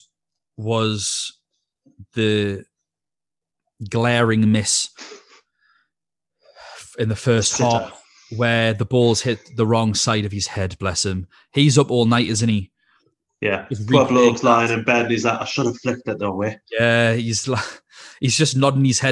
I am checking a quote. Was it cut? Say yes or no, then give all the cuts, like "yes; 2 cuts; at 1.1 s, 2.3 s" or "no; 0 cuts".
no; 0 cuts